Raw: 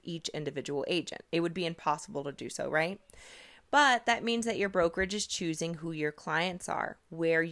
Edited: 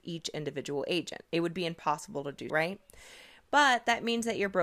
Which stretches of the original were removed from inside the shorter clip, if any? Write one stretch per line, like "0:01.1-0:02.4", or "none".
0:02.5-0:02.7